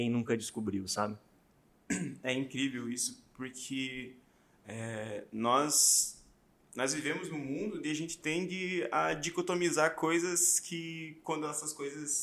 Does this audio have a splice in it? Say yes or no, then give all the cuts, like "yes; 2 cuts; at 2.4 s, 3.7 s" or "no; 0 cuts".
no; 0 cuts